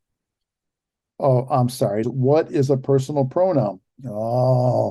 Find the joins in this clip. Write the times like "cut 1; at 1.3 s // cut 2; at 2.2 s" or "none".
cut 1; at 2.0 s // cut 2; at 3.8 s